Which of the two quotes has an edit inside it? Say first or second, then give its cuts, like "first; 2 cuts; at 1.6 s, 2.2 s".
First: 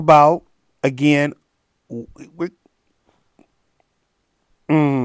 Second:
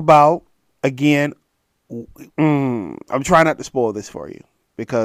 second; 1 cut; at 2.3 s